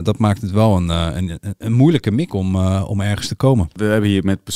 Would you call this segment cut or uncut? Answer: cut